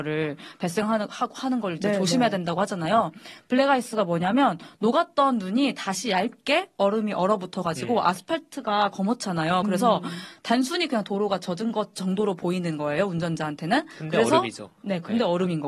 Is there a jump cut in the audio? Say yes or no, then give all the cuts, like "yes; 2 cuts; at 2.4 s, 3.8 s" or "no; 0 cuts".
no; 0 cuts